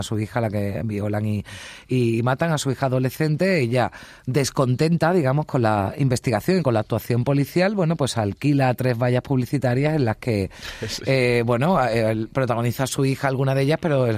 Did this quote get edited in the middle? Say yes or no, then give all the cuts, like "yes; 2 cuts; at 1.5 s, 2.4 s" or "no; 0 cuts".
no; 0 cuts